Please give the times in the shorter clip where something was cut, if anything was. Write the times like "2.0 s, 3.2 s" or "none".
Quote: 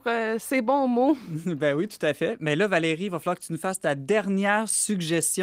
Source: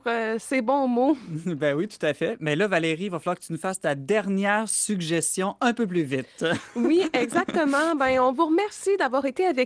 none

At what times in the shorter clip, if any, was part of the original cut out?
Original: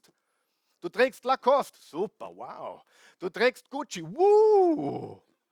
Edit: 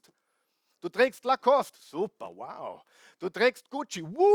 none

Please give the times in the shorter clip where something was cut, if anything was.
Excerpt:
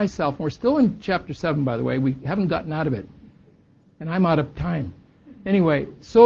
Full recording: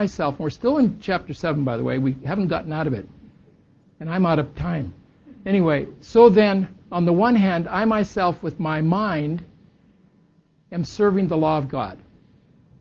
none

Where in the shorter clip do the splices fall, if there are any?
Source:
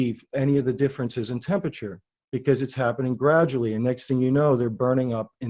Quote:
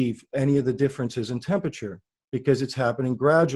none

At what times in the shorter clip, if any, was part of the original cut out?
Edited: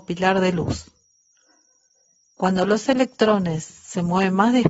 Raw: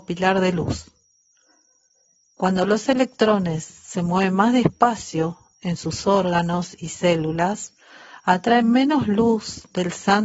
none

